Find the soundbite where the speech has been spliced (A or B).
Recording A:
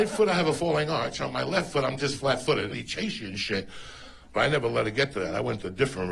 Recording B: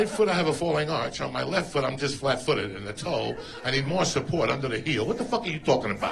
A